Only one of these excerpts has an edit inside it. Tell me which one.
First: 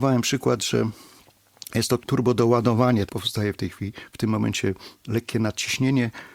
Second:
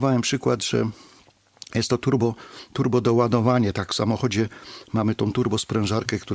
first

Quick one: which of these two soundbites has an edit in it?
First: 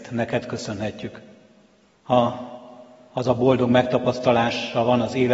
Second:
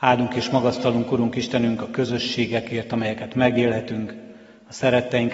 first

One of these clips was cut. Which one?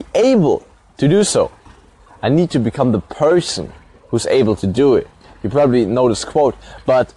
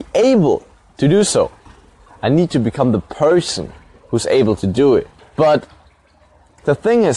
second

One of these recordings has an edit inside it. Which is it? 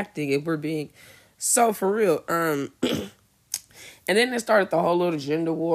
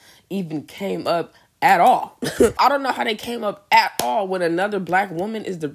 second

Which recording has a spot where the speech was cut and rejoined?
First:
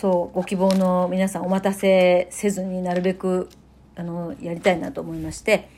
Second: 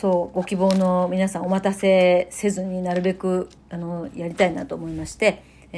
second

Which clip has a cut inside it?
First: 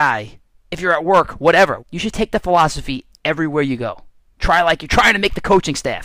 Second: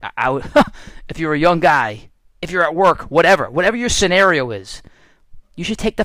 first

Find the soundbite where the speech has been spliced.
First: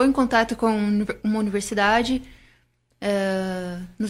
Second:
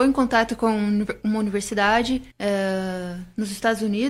second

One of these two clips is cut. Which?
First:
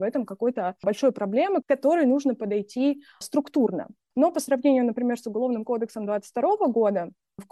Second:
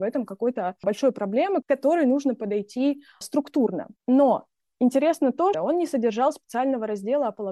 second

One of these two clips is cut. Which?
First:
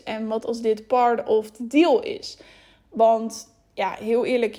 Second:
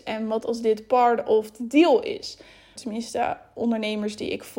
second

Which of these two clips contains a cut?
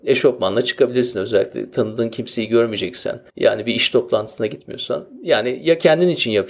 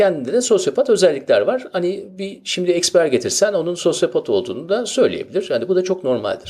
first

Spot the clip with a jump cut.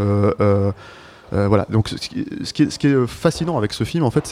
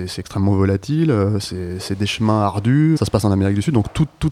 second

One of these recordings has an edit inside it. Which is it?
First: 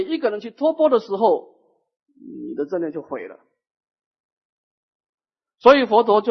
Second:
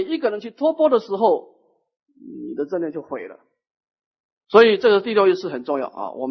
second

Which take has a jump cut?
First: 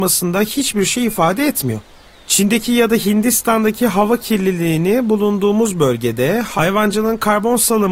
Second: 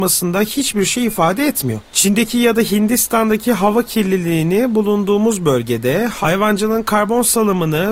second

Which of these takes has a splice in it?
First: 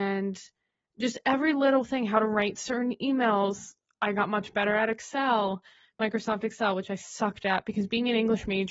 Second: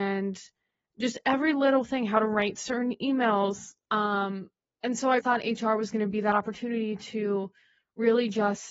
second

